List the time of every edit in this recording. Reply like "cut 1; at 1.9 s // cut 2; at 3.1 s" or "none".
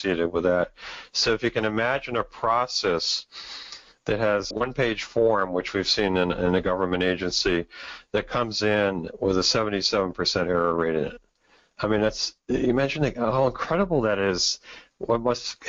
cut 1; at 4.5 s